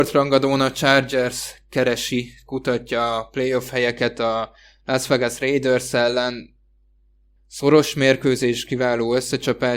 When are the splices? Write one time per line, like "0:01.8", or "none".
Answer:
0:07.4